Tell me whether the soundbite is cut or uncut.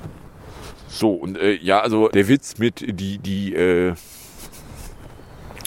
cut